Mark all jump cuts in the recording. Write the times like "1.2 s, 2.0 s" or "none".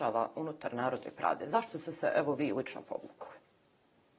none